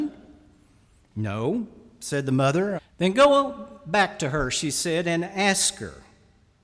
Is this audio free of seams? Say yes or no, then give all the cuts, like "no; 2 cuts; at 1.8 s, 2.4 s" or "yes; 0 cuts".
no; 1 cut; at 2.8 s